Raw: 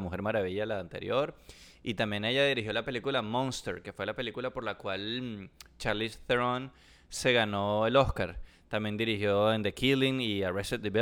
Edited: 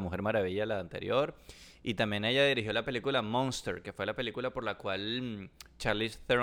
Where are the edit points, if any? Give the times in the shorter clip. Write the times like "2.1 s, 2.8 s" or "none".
none